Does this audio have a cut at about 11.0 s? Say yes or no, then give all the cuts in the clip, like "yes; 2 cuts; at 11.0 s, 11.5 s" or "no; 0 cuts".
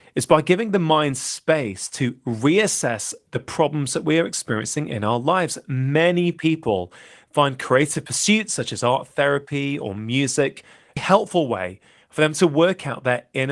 yes; 1 cut; at 11.0 s